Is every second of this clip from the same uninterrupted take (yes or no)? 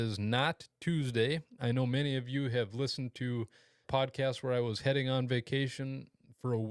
no